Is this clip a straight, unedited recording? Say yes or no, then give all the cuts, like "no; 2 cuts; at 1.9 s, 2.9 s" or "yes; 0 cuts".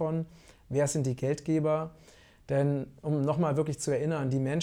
yes; 0 cuts